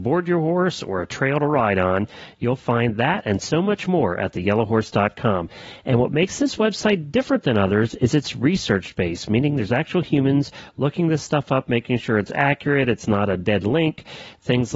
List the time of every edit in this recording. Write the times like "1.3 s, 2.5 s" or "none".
none